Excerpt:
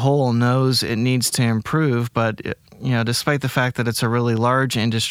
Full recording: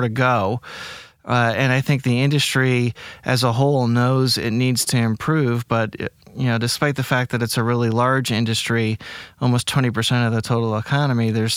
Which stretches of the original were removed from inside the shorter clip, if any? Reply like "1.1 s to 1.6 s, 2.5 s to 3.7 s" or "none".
none